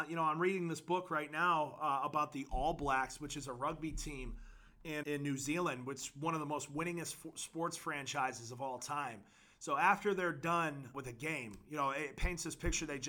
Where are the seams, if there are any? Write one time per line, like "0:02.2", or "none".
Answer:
0:05.0
0:09.5
0:10.9